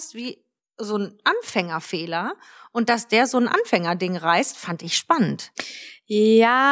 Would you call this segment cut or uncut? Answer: uncut